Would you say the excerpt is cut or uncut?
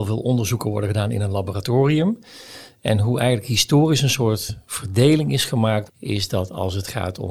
cut